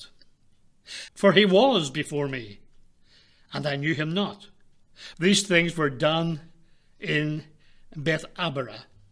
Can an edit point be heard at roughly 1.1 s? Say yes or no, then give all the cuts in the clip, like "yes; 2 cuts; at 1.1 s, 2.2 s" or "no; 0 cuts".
yes; 2 cuts; at 1.1 s, 5.1 s